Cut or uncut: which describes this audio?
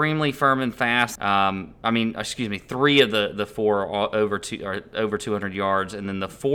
cut